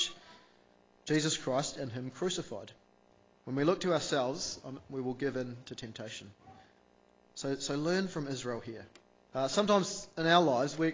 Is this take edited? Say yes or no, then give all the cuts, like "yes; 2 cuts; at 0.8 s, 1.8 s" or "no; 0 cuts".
yes; 3 cuts; at 3.3 s, 4.8 s, 9.3 s